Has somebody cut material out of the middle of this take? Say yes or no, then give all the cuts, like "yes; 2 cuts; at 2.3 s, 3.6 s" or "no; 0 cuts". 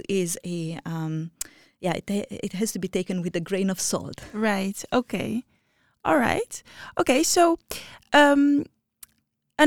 no; 0 cuts